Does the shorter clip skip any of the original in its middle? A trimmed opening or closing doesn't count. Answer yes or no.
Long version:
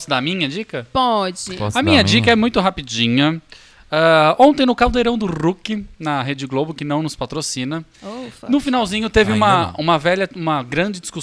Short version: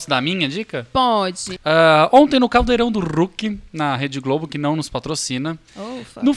yes